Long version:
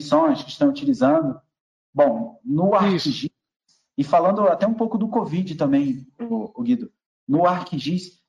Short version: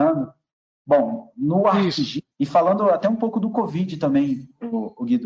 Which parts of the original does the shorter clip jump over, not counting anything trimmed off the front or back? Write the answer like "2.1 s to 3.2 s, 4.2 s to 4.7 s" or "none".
3.4 s to 3.9 s